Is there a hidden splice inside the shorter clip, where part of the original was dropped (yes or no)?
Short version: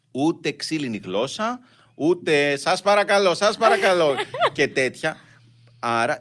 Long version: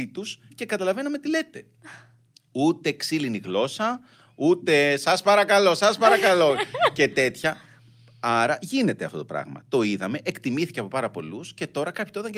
no